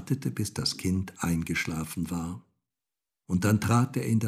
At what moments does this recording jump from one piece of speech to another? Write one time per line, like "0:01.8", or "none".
none